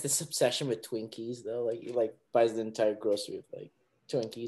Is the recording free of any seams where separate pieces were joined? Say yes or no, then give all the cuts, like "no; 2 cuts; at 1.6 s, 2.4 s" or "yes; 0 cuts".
yes; 0 cuts